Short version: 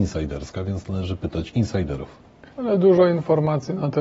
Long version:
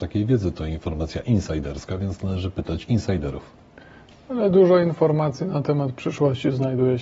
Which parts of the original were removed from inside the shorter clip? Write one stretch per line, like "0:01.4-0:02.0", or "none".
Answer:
0:03.9-0:04.2